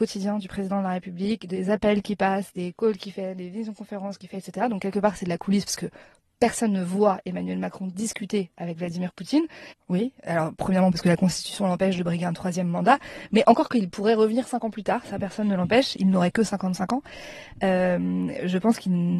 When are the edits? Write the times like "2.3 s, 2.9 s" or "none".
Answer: 9.7 s

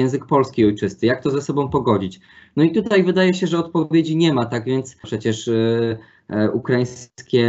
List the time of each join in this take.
5.0 s

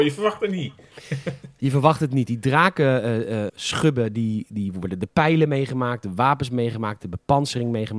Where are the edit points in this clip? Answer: 3.5 s

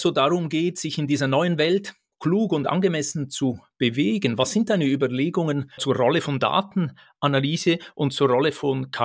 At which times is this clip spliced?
5.8 s

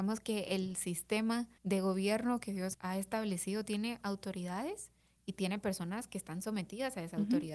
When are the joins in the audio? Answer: 1.6 s, 2.7 s

